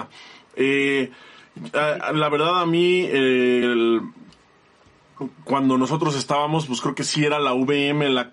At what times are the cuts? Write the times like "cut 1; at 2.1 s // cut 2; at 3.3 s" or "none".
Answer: none

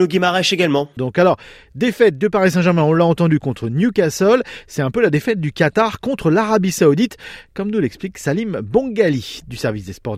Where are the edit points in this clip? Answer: cut 1; at 1.0 s

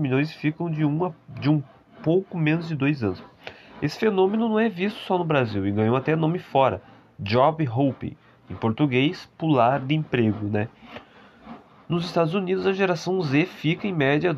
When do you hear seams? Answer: none

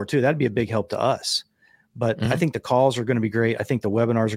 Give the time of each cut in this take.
none

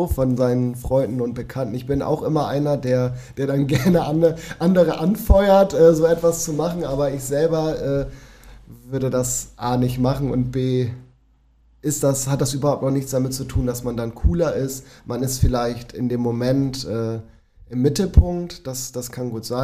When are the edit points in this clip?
none

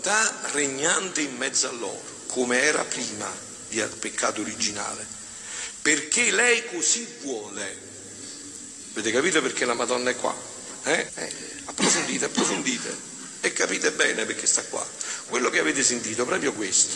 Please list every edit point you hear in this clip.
cut 1; at 11.1 s // cut 2; at 15.3 s

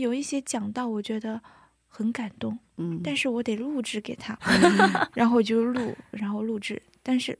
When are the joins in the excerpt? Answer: cut 1; at 4.4 s // cut 2; at 6.1 s

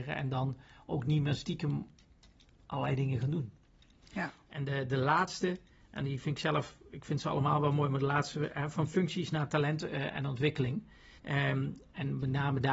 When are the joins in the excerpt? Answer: cut 1; at 11.2 s

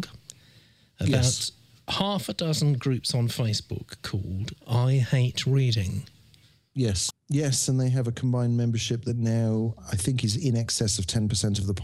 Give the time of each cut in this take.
cut 1; at 7.1 s

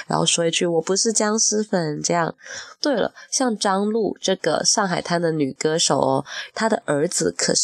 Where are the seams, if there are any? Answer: cut 1; at 2.8 s // cut 2; at 6.5 s

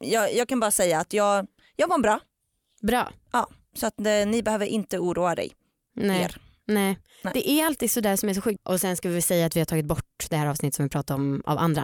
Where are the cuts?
cut 1; at 8.6 s

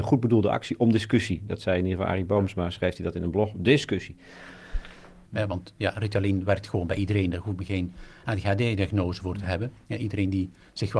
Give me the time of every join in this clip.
cut 1; at 5.3 s

